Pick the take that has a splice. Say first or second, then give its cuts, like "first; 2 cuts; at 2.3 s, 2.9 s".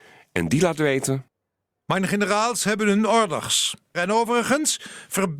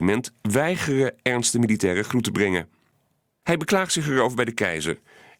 first; 1 cut; at 3.9 s